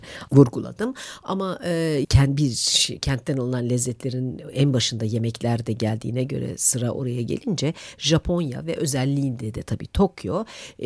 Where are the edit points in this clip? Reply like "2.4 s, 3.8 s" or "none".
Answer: 2.0 s